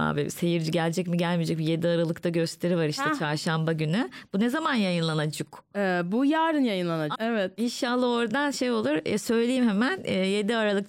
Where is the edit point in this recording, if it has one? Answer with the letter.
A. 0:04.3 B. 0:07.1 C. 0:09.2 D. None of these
B